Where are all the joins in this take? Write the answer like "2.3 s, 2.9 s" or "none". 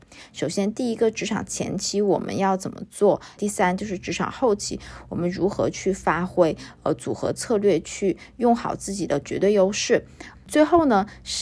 3.4 s, 10.3 s